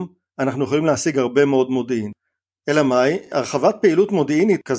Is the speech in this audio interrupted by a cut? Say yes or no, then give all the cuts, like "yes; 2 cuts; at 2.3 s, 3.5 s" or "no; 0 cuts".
no; 0 cuts